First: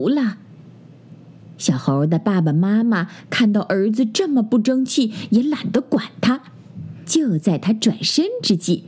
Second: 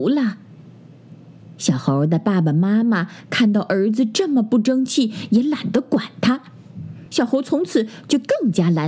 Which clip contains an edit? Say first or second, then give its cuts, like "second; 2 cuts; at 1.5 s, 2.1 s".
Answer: first; 1 cut; at 7.1 s